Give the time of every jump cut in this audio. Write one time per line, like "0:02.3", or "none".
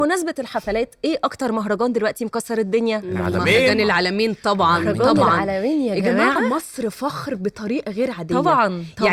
none